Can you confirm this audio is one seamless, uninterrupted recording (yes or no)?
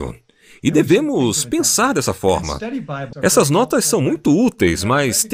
no